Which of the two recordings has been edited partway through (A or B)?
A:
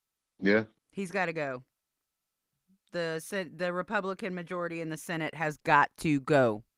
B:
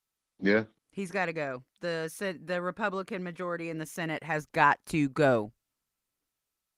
B